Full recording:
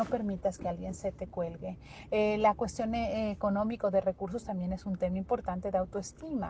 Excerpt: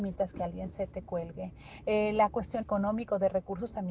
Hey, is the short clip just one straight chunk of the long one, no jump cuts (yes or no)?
no